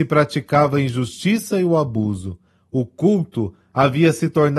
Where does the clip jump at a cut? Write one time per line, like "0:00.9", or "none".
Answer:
none